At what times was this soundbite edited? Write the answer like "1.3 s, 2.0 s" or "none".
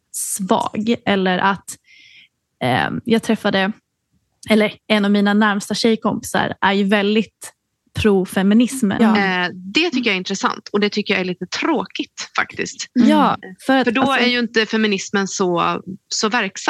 7.8 s, 9.0 s